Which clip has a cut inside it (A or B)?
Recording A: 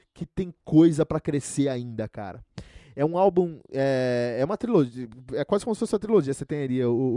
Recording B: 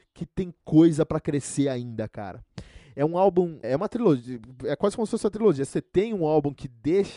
B